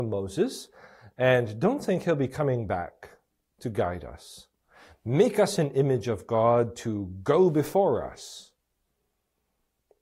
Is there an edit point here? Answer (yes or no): no